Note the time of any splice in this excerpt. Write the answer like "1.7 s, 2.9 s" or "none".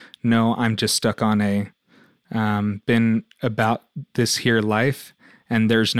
none